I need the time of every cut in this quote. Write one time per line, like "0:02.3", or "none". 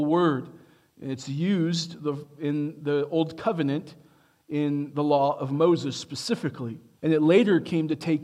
0:07.0